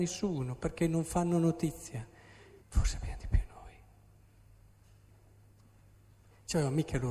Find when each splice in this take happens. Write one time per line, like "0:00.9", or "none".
0:02.6

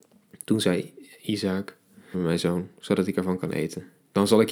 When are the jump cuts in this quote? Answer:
0:02.1

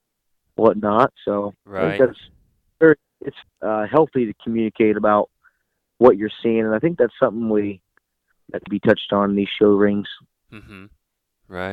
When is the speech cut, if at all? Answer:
0:03.4
0:08.7

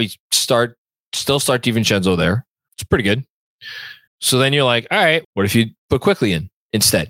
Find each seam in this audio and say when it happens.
0:02.7
0:04.1
0:05.2

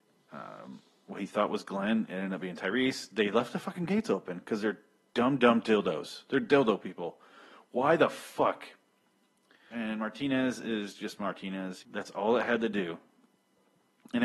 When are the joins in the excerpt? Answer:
0:09.7
0:11.8

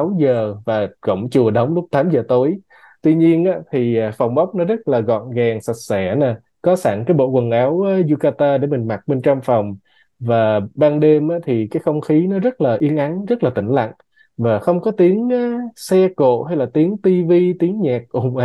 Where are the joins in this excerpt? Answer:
none

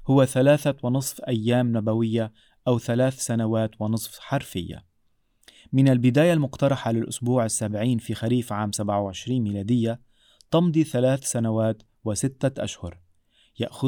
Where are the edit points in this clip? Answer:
none

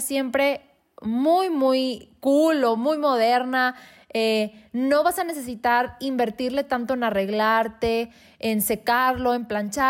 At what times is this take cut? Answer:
none

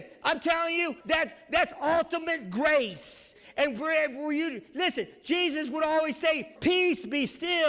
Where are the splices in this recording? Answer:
0:01.0
0:06.6

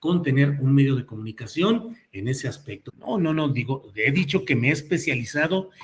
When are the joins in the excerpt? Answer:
0:02.9

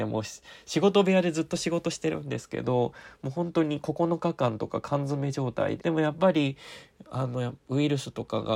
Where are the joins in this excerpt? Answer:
0:05.8

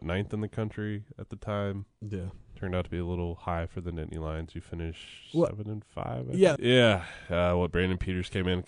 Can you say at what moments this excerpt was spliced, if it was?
0:06.6

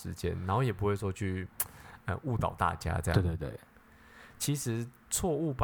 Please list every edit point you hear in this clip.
0:04.3

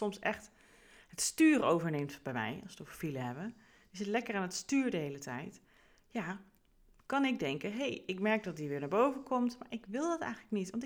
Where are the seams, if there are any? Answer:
none

